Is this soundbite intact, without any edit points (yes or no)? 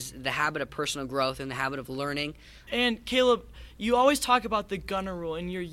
no